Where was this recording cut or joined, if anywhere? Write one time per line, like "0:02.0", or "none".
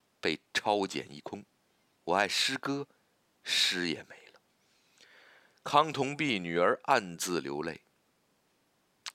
0:02.0